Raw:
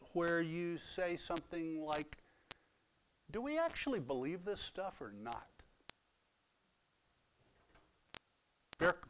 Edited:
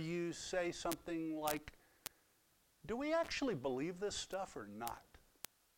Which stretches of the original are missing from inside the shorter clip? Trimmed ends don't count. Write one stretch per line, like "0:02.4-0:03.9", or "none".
none